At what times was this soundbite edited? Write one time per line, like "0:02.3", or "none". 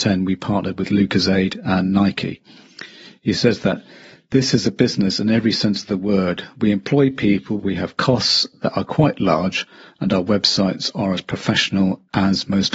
0:07.6